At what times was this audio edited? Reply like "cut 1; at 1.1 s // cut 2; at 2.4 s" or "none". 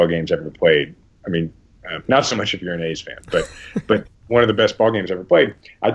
cut 1; at 1.8 s // cut 2; at 4.1 s